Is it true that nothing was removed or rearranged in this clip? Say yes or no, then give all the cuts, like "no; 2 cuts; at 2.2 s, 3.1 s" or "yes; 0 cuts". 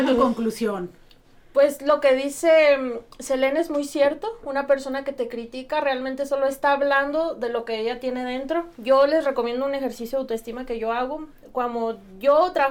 yes; 0 cuts